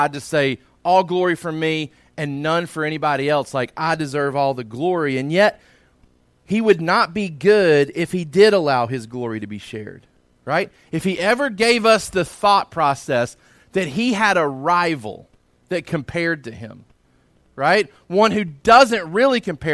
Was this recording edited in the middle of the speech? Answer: yes; 1 cut; at 17.4 s

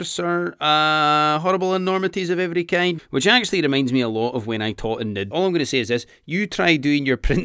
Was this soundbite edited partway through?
yes; 2 cuts; at 3.0 s, 5.3 s

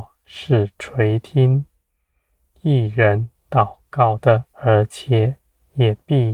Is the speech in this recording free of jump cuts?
no; 1 cut; at 4.5 s

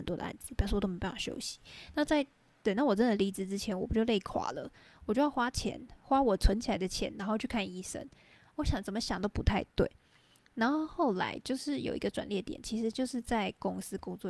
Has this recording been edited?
no; 0 cuts

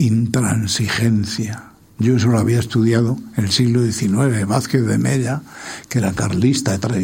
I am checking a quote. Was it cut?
no; 0 cuts

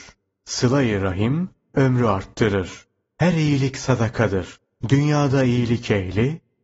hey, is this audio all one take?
yes; 0 cuts

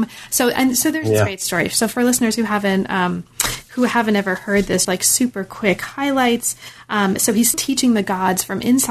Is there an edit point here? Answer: yes; 2 cuts; at 4.8 s, 7.5 s

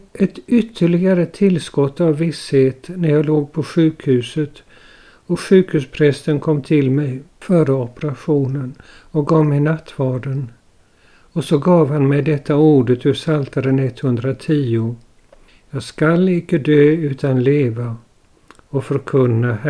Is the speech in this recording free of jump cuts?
yes; 0 cuts

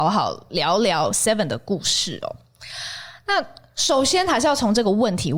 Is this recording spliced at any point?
no; 0 cuts

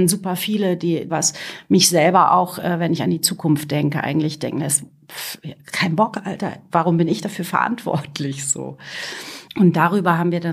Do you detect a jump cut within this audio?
yes; 1 cut; at 1.1 s

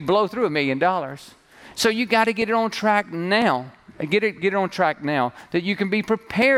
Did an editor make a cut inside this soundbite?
no; 0 cuts

